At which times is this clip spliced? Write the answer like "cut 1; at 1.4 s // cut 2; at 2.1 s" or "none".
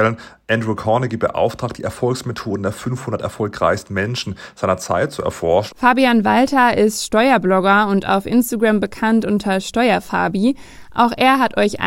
cut 1; at 5.7 s